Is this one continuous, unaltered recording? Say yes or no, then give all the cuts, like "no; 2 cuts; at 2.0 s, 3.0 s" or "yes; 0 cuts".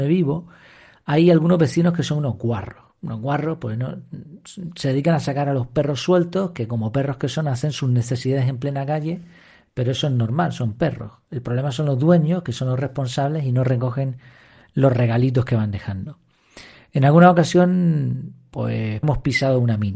no; 1 cut; at 19.0 s